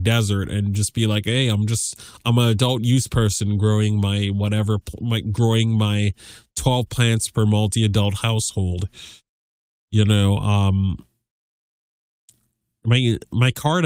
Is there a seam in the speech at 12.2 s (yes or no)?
no